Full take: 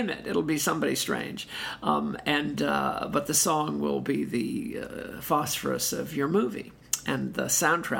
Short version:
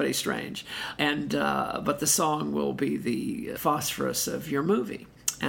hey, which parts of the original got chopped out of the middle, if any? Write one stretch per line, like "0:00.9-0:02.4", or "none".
0:01.8-0:02.2
0:04.8-0:05.2